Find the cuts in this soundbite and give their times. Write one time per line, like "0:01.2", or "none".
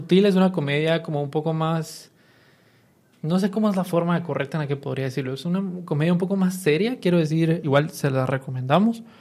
0:07.6